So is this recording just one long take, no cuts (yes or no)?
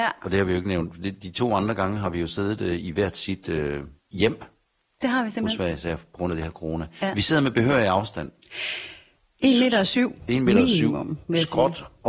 yes